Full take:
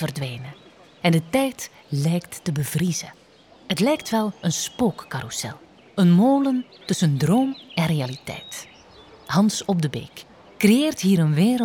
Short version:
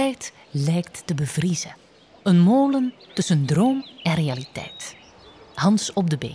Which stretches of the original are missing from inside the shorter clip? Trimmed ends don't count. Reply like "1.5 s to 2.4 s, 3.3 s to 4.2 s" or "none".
3.6 s to 5.9 s